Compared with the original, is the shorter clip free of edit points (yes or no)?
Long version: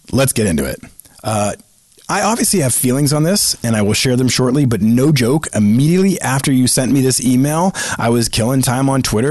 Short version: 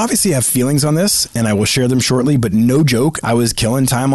no